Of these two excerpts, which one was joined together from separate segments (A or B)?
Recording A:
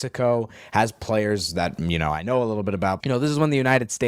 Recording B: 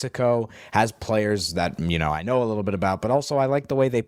A